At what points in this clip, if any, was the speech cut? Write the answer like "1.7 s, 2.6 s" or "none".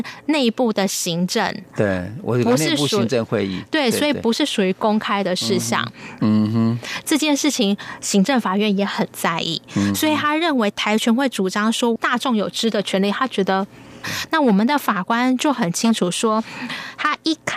6.2 s, 14.0 s